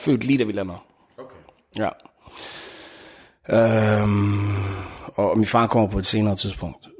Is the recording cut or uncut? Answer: uncut